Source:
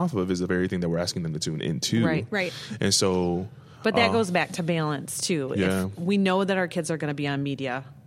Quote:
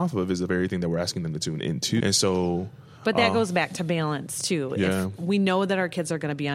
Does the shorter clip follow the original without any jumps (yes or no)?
no